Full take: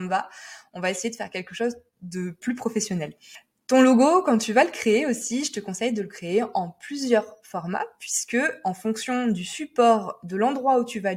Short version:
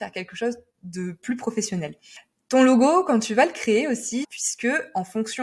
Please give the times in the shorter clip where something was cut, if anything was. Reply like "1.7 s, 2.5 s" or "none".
4.2 s